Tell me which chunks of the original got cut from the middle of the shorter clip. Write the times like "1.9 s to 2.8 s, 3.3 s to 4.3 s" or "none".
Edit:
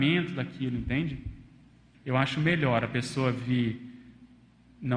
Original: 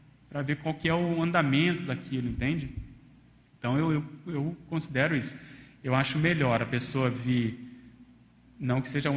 3.5 s to 5.7 s